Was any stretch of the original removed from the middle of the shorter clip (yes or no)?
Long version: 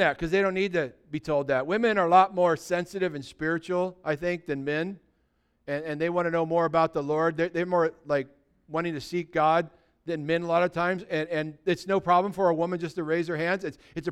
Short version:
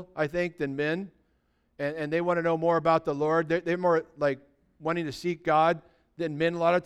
no